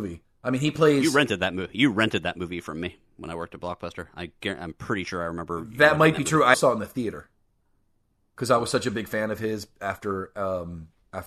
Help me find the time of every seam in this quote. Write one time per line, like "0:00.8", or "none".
0:06.5

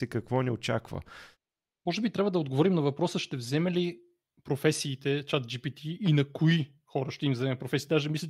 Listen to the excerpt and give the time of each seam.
none

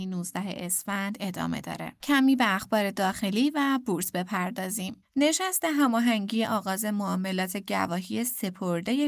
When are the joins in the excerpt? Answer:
0:02.0

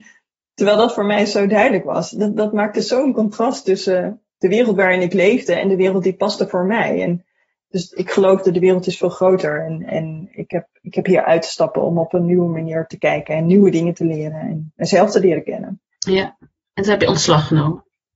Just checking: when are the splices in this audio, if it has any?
none

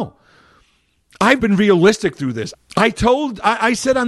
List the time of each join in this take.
0:01.4
0:02.5

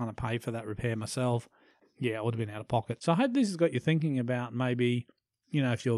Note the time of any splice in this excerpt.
0:03.0

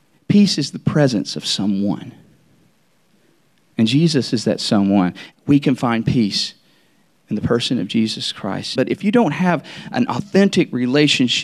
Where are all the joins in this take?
0:05.3
0:08.8

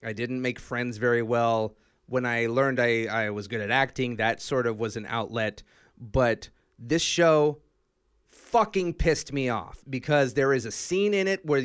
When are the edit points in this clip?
none

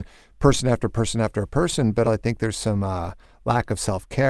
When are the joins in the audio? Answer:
0:02.0

